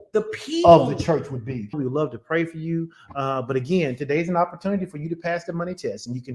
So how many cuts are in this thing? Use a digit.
1